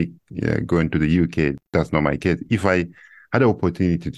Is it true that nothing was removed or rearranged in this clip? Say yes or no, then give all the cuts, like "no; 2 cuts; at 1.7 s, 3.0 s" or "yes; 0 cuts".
yes; 0 cuts